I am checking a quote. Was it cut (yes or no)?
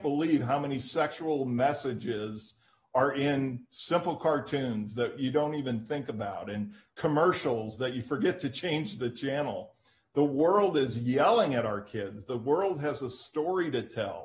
no